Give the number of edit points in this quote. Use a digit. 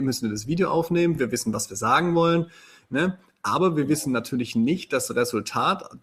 0